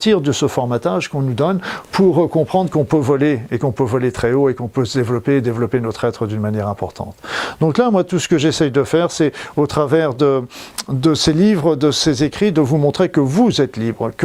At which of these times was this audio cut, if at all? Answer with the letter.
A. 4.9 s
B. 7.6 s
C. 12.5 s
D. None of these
D